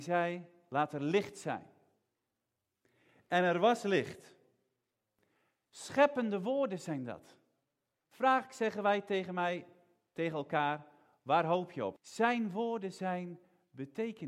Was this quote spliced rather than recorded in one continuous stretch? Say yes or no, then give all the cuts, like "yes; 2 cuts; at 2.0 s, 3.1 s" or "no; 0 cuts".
yes; 2 cuts; at 8.0 s, 12.0 s